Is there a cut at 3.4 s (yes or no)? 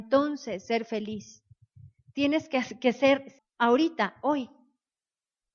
yes